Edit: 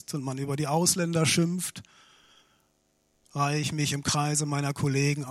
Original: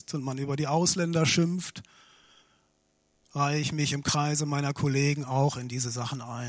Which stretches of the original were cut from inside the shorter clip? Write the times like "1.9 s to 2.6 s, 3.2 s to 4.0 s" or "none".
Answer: none